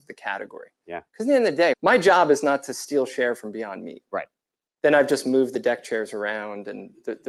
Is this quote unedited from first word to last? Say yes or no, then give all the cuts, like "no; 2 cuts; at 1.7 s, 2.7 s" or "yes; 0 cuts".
no; 1 cut; at 1.7 s